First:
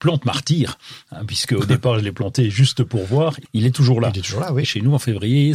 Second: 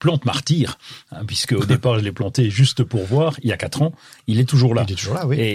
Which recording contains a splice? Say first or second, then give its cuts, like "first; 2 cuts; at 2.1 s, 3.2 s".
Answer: first; 2 cuts; at 3.4 s, 4.6 s